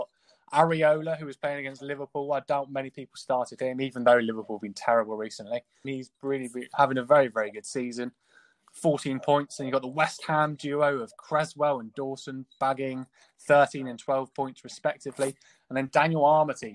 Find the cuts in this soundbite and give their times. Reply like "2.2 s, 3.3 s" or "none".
5.8 s